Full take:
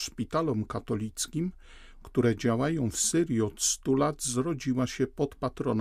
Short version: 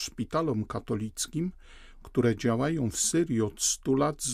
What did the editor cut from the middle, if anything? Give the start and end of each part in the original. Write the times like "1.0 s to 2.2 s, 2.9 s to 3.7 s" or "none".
none

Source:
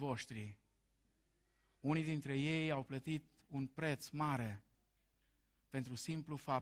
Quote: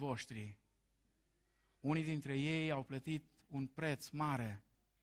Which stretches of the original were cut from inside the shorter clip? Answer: none

